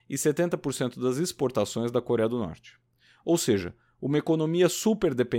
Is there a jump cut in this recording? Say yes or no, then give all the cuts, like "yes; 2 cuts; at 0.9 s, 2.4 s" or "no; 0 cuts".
no; 0 cuts